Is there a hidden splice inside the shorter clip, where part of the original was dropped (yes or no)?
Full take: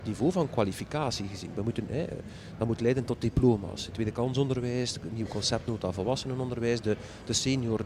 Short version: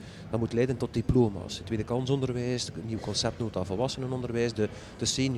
no